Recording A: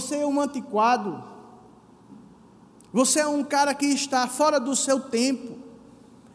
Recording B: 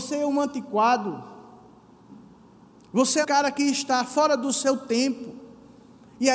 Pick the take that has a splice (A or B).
B